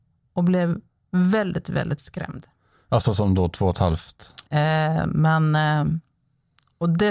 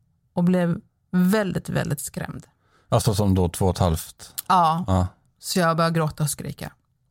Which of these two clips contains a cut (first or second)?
first